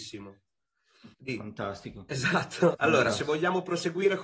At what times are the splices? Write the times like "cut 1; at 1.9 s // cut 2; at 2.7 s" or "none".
cut 1; at 1.1 s // cut 2; at 2.7 s